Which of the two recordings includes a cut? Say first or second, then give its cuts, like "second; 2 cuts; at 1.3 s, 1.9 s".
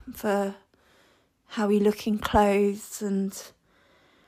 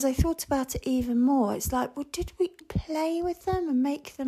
second; 1 cut; at 2.6 s